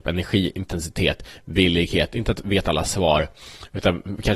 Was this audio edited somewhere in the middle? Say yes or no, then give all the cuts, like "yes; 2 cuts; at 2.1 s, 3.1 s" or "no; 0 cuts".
no; 0 cuts